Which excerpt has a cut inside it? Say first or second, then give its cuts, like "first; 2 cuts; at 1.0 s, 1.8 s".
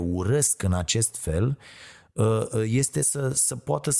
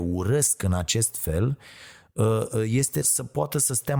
second; 1 cut; at 3.0 s